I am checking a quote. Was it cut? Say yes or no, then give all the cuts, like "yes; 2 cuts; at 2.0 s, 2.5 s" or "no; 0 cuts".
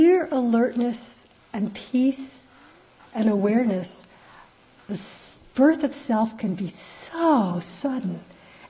no; 0 cuts